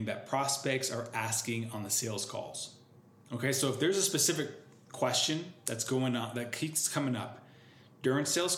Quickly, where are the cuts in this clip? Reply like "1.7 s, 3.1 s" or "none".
none